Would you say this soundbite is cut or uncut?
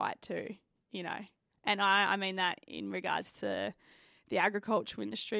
cut